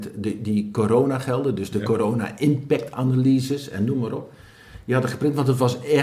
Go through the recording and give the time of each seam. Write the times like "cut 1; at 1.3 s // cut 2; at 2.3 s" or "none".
none